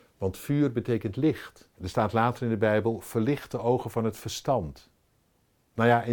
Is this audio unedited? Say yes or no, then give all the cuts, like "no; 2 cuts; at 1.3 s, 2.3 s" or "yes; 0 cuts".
no; 1 cut; at 1.7 s